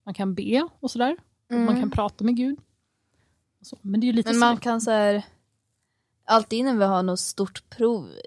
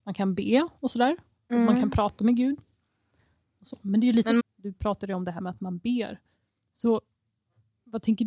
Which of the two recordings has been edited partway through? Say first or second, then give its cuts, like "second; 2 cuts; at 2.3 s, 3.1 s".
second; 1 cut; at 4.4 s